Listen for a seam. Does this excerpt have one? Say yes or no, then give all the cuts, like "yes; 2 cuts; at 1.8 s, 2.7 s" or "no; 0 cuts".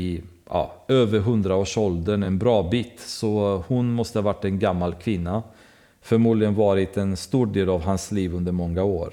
no; 0 cuts